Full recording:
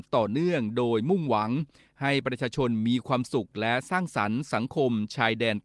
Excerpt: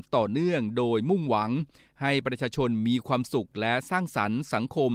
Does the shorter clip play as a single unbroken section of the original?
yes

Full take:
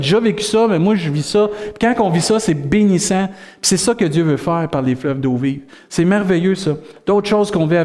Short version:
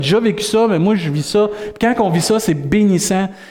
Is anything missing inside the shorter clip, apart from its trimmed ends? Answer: no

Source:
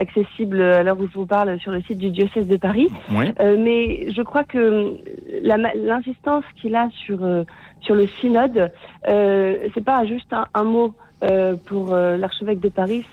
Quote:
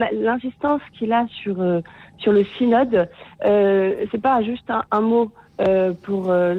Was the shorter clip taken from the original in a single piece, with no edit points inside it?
yes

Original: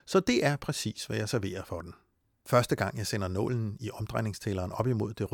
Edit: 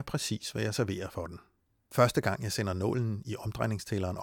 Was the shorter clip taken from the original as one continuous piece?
yes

